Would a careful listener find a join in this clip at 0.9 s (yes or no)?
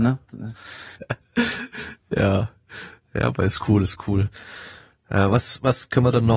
yes